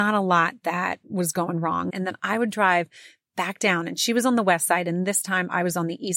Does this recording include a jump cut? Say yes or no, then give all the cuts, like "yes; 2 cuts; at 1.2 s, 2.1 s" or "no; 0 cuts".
yes; 1 cut; at 1.9 s